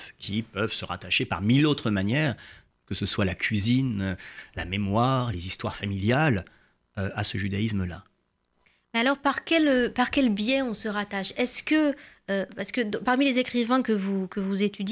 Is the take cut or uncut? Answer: uncut